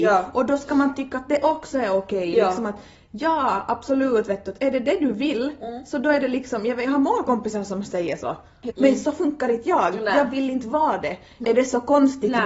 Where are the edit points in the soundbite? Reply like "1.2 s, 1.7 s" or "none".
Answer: 8.7 s, 11.4 s